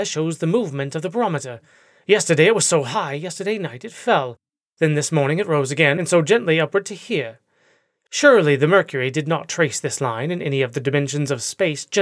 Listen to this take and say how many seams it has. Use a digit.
0